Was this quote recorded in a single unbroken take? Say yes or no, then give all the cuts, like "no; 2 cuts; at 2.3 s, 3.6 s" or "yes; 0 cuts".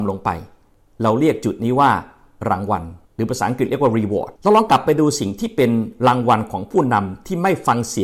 no; 2 cuts; at 3.0 s, 4.3 s